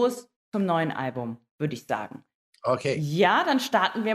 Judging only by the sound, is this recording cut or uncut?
uncut